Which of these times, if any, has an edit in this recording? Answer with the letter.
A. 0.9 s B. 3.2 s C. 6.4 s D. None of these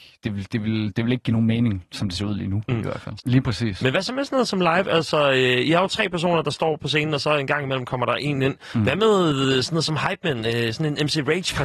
B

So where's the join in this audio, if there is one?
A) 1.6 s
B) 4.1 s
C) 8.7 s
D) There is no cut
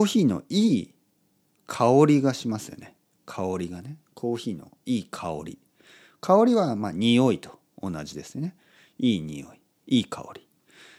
D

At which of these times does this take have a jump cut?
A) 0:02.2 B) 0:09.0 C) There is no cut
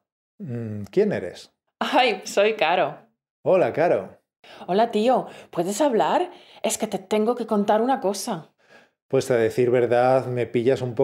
A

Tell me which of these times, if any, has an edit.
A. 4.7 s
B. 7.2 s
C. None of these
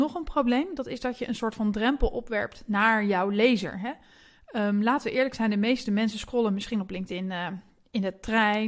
C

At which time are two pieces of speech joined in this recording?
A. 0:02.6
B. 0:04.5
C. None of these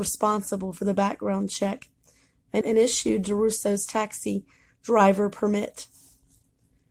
A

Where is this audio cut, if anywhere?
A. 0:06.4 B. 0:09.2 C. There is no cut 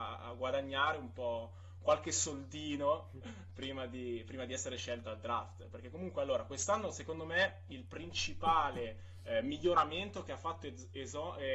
C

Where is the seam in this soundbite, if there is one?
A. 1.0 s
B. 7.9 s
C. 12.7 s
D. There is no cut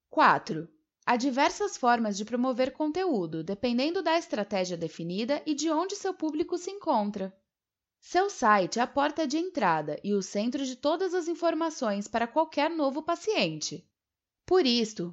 A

